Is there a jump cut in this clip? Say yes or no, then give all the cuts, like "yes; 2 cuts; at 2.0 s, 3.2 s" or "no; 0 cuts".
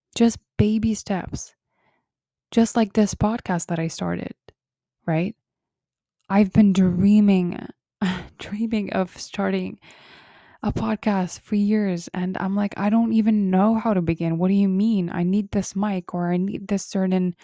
no; 0 cuts